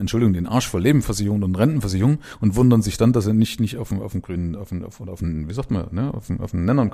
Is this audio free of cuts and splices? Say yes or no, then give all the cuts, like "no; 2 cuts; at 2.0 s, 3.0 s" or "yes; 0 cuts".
yes; 0 cuts